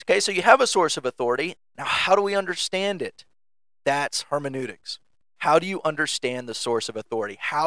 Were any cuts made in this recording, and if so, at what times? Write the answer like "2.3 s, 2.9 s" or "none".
1.6 s